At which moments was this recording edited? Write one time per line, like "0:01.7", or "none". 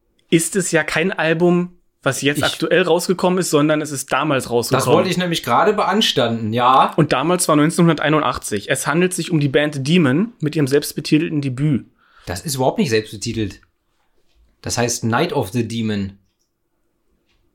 none